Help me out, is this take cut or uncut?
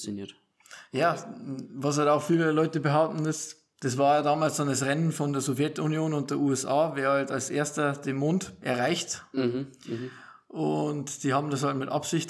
uncut